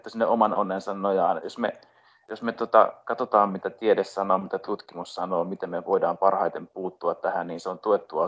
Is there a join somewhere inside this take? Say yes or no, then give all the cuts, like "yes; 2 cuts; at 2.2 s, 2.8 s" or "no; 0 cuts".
yes; 1 cut; at 1.4 s